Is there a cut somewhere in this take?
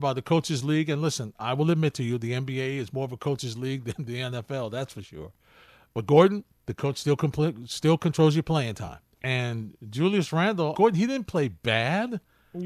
yes; 2 cuts; at 9.2 s, 10.7 s

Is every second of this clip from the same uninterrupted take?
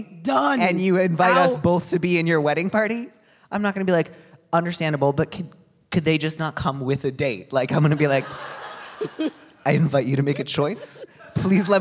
yes; 0 cuts

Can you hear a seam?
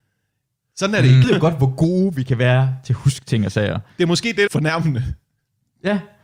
yes; 2 cuts; at 1.2 s, 4.5 s

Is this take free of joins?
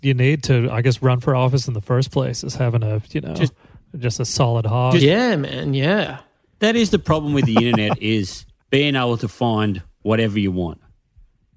yes; 0 cuts

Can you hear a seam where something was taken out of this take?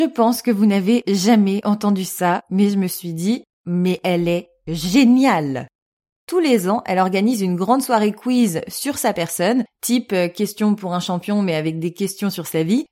no; 0 cuts

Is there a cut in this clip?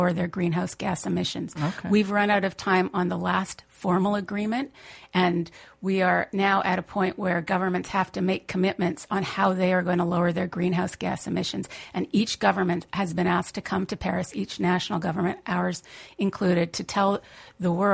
no; 0 cuts

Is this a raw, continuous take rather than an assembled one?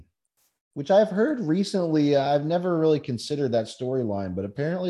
yes; 0 cuts

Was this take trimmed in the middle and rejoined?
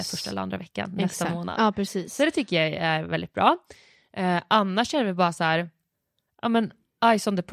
no; 0 cuts

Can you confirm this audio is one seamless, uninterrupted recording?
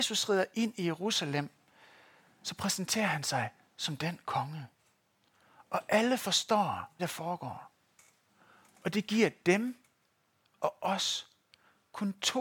no; 1 cut; at 7.0 s

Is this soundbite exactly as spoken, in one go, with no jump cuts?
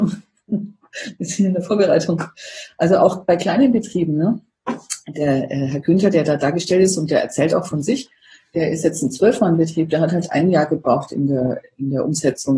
yes; 0 cuts

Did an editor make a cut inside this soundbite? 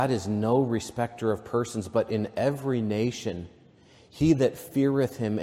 no; 0 cuts

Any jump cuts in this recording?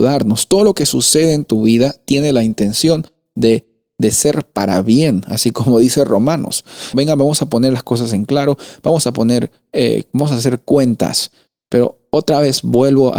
yes; 1 cut; at 6.9 s

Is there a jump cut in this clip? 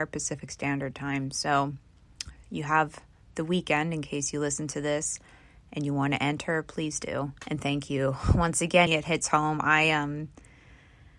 yes; 2 cuts; at 7.4 s, 8.9 s

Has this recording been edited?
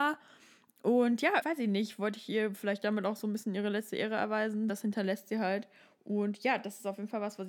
yes; 2 cuts; at 1.4 s, 4.7 s

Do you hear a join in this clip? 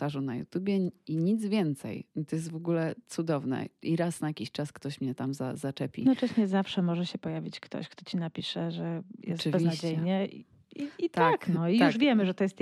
no; 0 cuts

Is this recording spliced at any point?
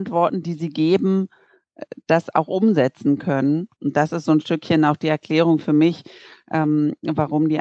yes; 1 cut; at 3.8 s

